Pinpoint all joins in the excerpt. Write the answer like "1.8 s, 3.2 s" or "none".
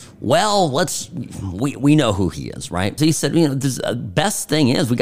3.0 s

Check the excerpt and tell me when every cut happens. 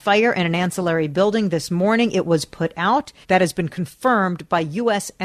3.2 s

